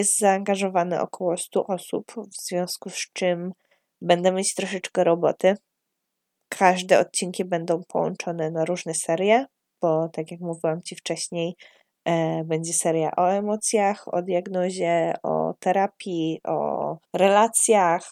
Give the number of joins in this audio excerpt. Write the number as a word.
one